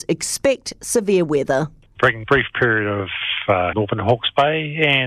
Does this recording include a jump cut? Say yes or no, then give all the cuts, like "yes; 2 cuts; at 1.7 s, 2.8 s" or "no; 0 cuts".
yes; 1 cut; at 3.7 s